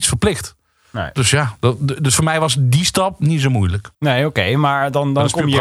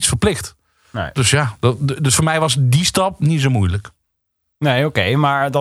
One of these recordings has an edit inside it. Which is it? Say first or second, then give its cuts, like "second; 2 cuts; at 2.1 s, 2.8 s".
first; 1 cut; at 3.9 s